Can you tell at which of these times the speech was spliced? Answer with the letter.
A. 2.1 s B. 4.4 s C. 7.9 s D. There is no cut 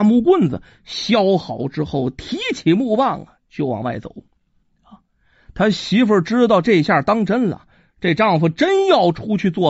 D